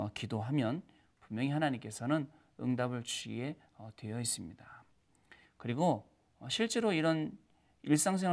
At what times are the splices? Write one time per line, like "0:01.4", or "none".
0:05.4